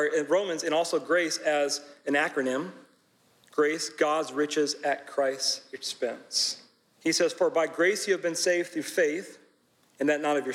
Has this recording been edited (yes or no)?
yes